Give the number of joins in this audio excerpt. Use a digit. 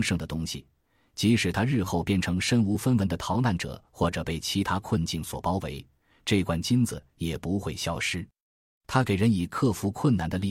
0